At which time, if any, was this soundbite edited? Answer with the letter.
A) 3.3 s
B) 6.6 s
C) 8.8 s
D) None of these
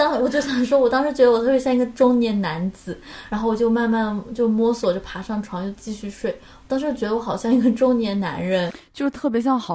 A